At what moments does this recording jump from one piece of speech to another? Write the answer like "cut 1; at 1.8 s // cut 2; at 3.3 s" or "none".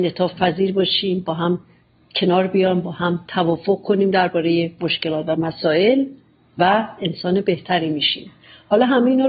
none